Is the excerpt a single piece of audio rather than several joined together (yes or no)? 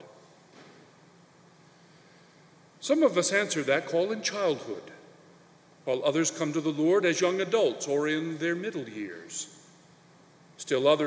yes